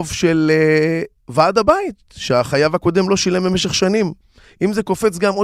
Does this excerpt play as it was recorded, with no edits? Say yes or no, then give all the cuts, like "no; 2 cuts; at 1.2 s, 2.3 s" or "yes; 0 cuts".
yes; 0 cuts